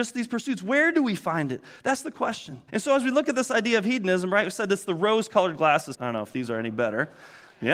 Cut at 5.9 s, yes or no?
yes